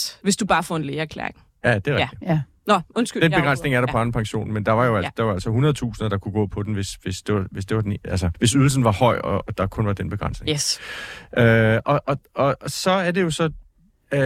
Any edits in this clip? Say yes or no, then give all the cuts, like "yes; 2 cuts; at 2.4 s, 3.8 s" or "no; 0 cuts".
yes; 1 cut; at 8.3 s